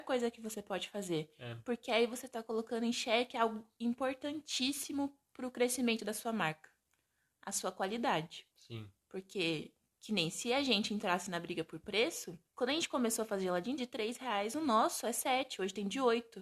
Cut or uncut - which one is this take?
cut